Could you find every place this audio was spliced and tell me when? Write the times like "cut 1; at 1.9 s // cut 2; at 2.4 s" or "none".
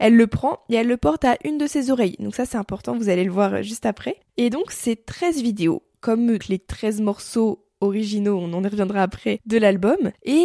cut 1; at 4.3 s // cut 2; at 6.4 s

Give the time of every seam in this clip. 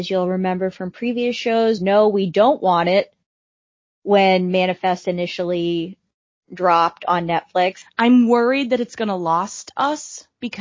cut 1; at 1.8 s // cut 2; at 7.8 s

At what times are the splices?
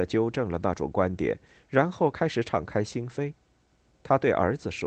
cut 1; at 3.8 s

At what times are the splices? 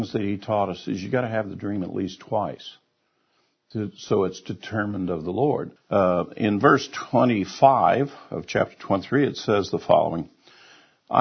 cut 1; at 5.8 s

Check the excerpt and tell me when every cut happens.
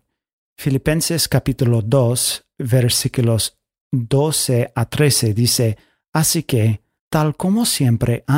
cut 1; at 7.0 s

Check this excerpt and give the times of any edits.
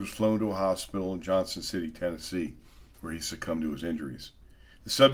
none

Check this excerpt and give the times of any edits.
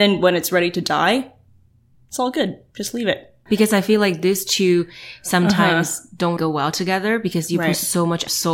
cut 1; at 3.5 s // cut 2; at 6.4 s

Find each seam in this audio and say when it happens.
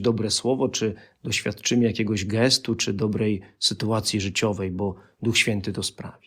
none

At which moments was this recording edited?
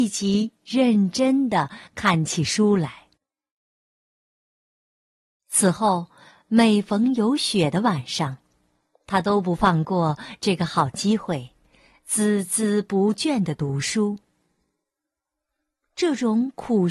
none

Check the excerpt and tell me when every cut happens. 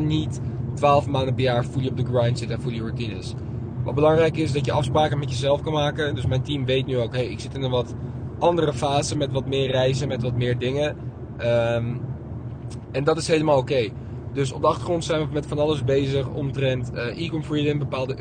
none

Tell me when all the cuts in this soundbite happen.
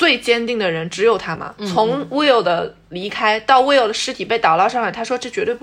cut 1; at 1.4 s

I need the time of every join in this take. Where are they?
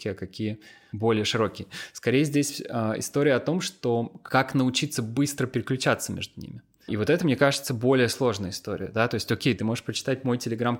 cut 1; at 6.9 s // cut 2; at 9.6 s

